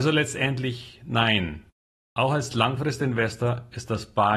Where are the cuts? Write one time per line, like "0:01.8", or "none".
none